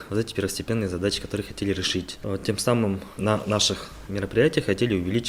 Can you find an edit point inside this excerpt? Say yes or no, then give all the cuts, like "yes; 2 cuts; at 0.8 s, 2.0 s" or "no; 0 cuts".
no; 0 cuts